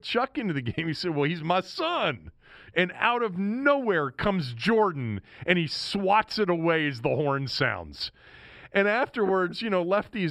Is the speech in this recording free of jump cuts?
no; 1 cut; at 2.7 s

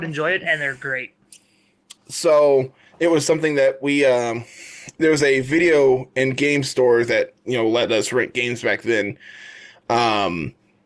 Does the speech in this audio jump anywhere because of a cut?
yes; 1 cut; at 2.0 s

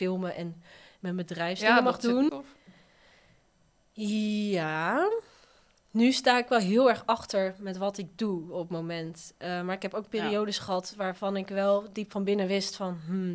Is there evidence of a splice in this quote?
yes; 1 cut; at 2.3 s

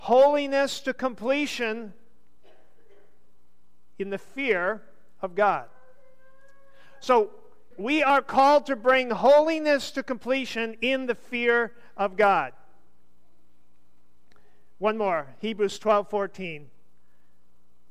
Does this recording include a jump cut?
yes; 1 cut; at 7.7 s

